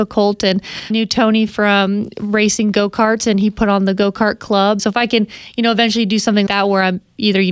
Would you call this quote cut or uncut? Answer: cut